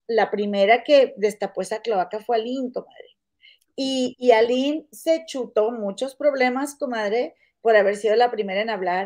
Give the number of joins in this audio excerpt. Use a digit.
0